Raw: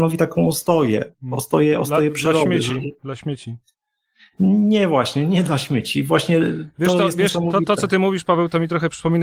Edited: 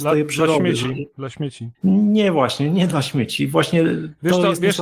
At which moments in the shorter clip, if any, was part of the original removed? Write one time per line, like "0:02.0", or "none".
0:01.7

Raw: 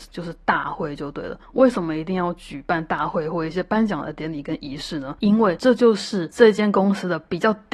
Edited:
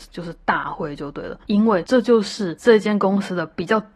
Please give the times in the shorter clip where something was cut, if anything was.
0:01.4

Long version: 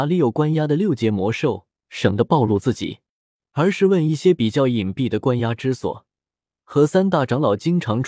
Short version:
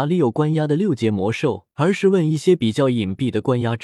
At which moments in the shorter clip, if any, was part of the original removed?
0:01.7

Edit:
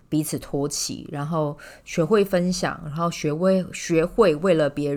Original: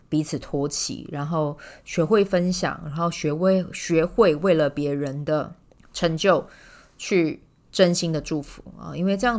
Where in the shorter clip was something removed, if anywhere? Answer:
none

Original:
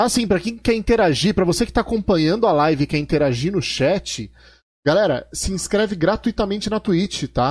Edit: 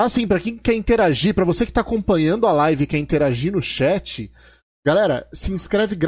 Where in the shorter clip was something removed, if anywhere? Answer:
none

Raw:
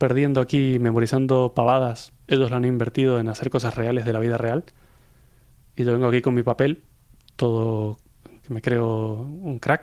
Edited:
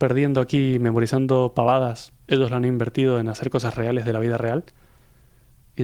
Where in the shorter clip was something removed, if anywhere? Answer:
none

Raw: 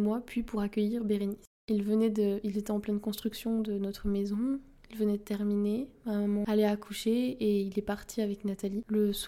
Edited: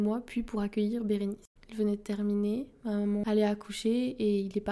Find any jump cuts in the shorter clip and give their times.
0:01.6

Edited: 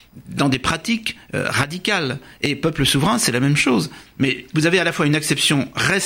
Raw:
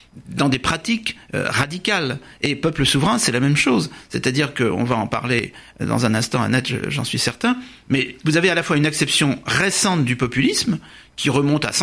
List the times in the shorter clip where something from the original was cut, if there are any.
0:04.1

